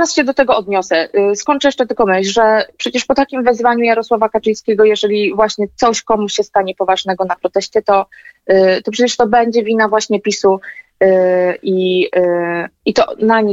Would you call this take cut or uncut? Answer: uncut